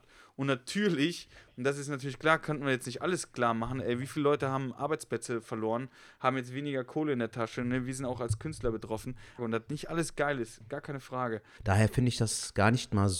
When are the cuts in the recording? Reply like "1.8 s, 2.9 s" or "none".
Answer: 9.4 s, 11.6 s